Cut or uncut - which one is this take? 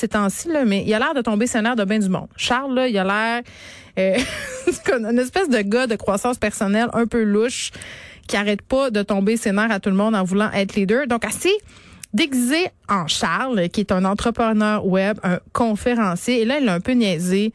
uncut